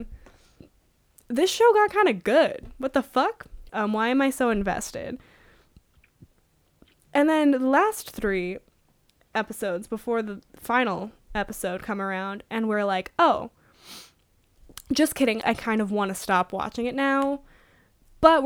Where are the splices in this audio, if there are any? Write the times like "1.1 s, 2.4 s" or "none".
3.7 s, 15.4 s